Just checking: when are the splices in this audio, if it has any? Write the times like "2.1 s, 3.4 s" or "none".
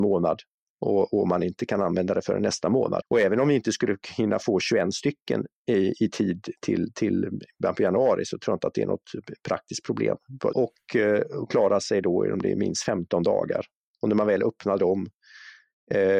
3.0 s, 10.5 s

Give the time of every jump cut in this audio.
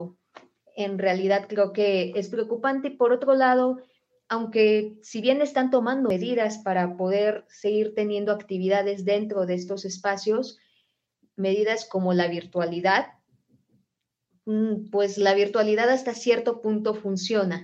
none

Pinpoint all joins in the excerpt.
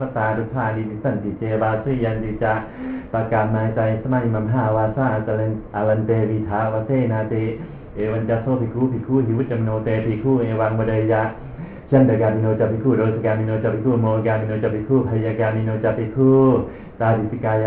none

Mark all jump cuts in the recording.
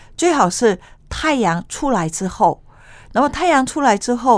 none

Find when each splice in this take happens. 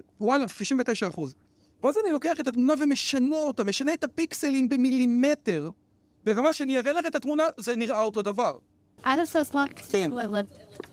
9.0 s

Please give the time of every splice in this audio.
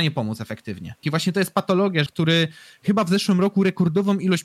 1.0 s, 2.1 s

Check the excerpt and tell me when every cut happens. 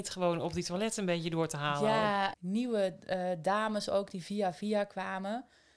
2.3 s

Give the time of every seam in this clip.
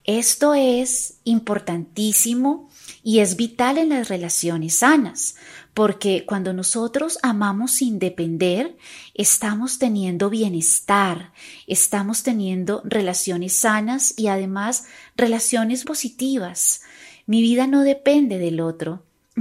15.8 s

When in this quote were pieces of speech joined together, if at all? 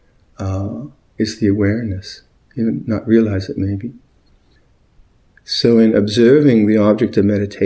none

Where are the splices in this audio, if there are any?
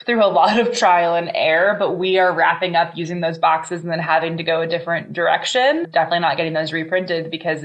none

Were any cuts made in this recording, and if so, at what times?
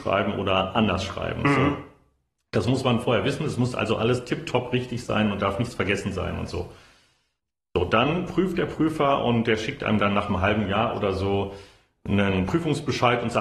none

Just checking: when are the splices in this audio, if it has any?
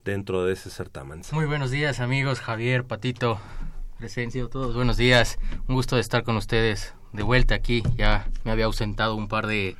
1.2 s

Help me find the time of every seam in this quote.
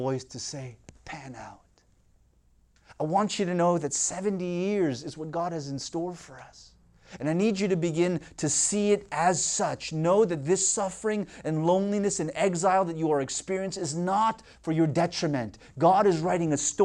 7.2 s

